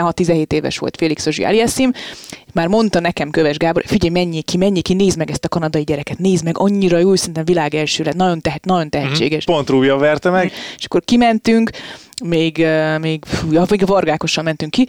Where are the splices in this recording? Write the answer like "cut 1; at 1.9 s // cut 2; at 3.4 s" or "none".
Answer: cut 1; at 9.5 s // cut 2; at 10.5 s